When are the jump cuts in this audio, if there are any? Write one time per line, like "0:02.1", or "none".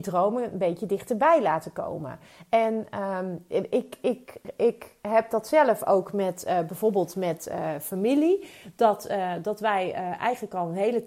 none